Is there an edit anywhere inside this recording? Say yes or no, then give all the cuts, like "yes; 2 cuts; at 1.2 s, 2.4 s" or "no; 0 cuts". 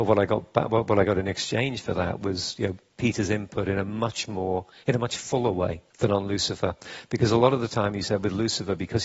yes; 1 cut; at 5.9 s